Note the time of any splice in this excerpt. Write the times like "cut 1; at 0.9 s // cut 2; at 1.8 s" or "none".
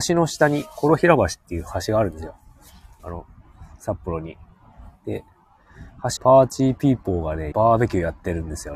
cut 1; at 6.2 s // cut 2; at 7.5 s